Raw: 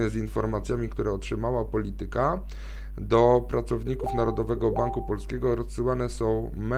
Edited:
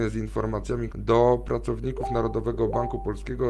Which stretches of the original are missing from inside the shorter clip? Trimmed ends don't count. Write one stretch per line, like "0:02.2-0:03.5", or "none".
0:00.9-0:02.9

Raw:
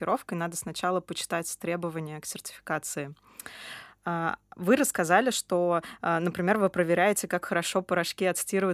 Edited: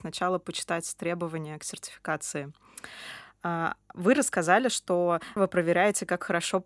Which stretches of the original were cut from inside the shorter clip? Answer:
0:06.0-0:06.6

